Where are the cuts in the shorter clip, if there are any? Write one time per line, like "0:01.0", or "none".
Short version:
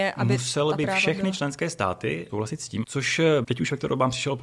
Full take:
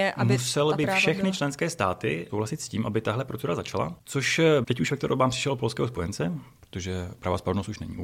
0:02.8